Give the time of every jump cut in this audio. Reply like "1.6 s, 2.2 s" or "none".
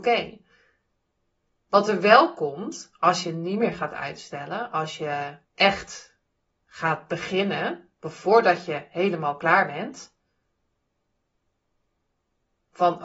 5.4 s